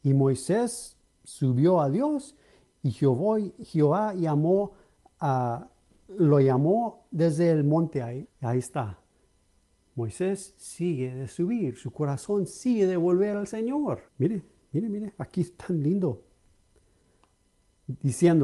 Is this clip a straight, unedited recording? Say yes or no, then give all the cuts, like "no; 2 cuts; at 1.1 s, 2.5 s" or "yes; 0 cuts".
no; 2 cuts; at 8.2 s, 14.1 s